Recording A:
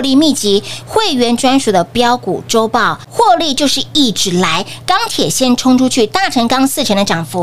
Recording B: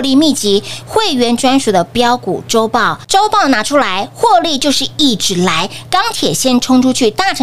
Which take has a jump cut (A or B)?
A